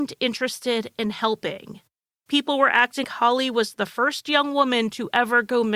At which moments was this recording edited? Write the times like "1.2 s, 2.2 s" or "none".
3.0 s